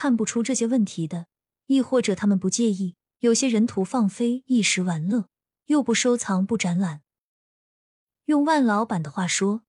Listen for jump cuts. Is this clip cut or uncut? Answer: uncut